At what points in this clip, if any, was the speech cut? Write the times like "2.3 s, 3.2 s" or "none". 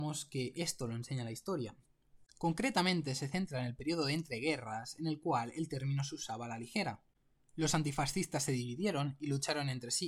2.3 s